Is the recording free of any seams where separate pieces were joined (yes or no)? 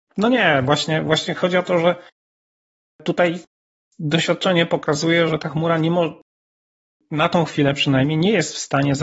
no